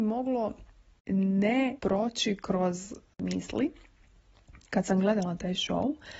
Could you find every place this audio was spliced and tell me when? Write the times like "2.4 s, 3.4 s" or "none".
1.8 s